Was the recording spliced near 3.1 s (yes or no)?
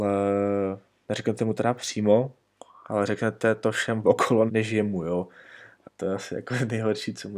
no